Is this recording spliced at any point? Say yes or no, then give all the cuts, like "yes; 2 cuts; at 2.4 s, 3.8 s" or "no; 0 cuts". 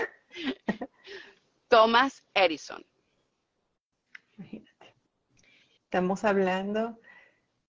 no; 0 cuts